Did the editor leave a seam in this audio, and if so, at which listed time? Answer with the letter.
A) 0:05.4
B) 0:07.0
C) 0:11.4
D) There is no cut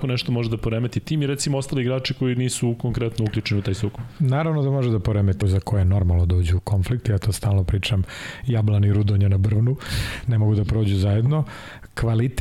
A